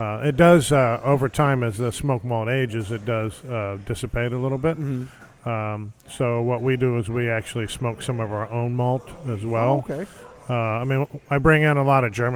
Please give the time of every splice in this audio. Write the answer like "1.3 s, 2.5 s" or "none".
none